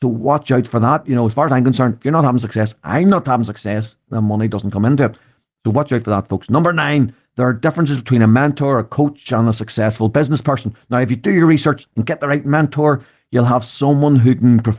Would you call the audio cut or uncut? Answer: uncut